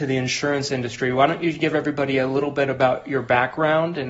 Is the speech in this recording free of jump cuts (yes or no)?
yes